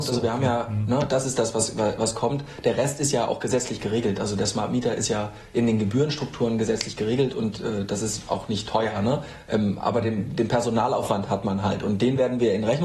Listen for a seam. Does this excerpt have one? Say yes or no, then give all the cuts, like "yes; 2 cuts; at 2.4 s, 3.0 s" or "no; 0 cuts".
no; 0 cuts